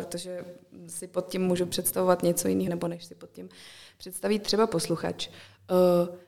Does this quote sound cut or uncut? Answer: cut